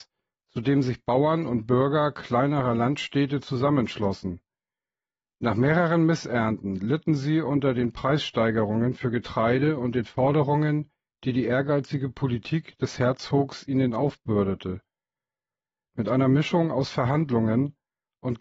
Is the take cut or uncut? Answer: uncut